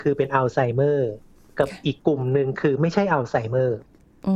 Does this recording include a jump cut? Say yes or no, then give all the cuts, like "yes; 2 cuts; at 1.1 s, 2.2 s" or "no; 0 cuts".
yes; 1 cut; at 2.0 s